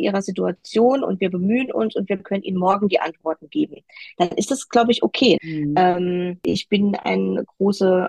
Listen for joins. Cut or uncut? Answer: cut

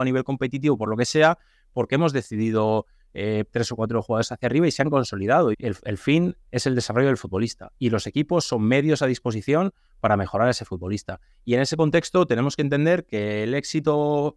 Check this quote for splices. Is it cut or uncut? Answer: cut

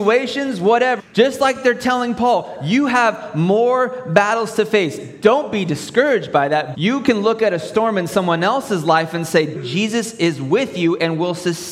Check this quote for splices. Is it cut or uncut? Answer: cut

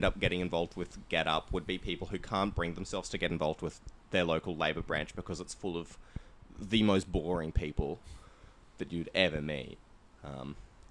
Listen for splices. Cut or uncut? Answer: uncut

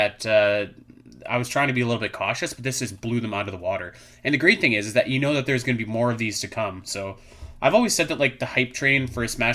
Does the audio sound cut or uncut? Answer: uncut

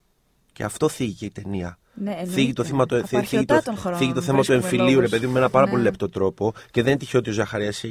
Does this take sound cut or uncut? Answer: uncut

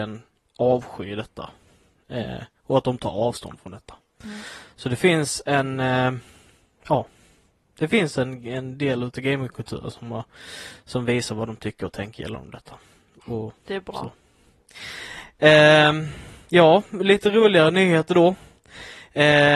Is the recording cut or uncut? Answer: uncut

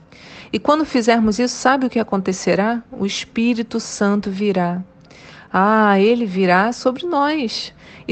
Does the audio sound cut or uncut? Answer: uncut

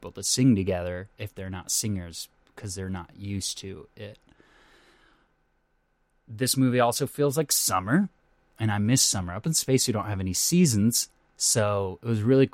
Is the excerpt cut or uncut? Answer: uncut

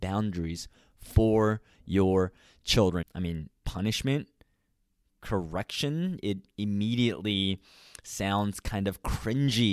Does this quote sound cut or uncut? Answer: cut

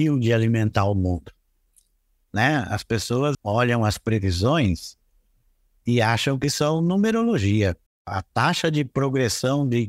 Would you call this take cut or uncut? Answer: cut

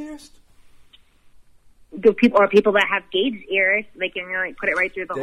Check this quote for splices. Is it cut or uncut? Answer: uncut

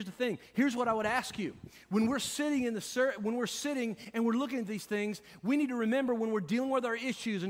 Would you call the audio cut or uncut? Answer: uncut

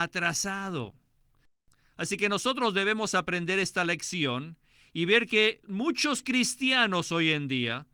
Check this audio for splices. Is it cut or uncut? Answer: uncut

